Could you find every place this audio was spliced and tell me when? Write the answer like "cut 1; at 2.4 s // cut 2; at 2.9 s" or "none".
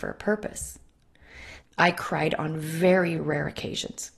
cut 1; at 1.6 s // cut 2; at 3.2 s